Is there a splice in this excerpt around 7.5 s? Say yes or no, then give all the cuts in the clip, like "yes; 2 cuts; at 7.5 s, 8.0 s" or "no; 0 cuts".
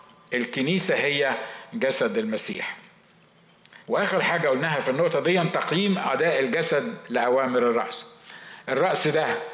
no; 1 cut; at 3.8 s